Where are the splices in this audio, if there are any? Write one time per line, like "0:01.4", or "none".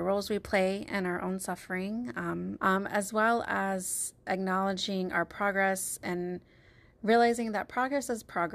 0:02.6